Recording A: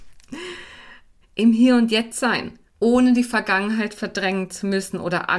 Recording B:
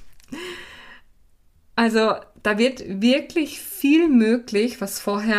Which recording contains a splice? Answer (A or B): A